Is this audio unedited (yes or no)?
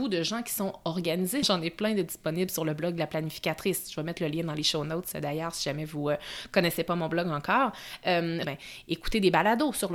no